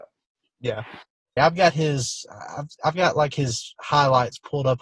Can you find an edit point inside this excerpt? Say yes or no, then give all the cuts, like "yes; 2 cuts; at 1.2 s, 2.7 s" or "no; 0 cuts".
yes; 1 cut; at 1.4 s